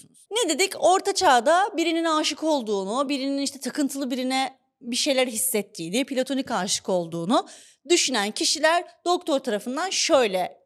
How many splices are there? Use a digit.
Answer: 0